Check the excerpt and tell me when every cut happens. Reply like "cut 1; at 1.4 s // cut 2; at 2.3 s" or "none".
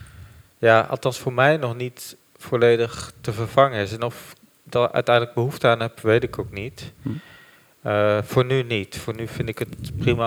none

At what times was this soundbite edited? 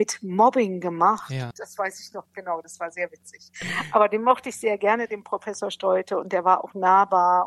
cut 1; at 1.5 s

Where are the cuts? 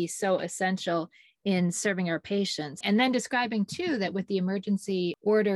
cut 1; at 2.8 s

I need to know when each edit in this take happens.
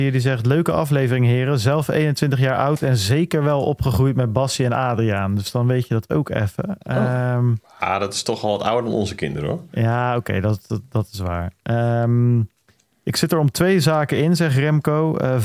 none

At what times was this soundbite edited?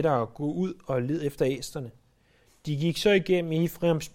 none

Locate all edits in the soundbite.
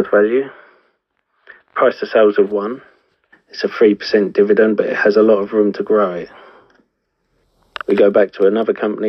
cut 1; at 3.3 s

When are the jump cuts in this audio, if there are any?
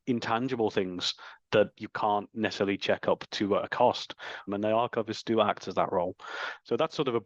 cut 1; at 4.5 s

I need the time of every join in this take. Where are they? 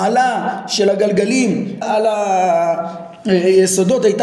cut 1; at 1.8 s

